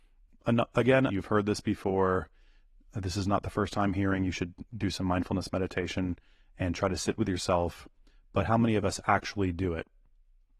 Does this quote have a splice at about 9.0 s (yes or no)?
no